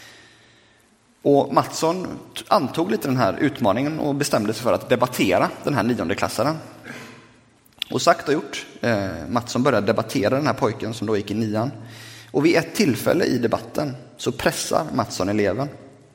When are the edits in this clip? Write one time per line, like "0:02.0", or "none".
none